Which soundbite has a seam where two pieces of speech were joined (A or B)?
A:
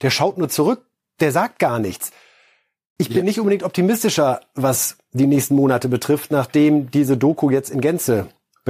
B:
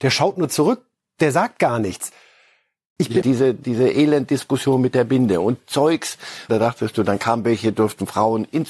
B